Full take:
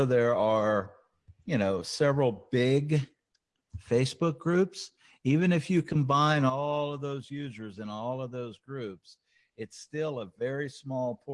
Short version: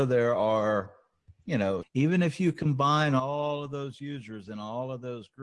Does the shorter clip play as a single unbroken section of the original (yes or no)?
no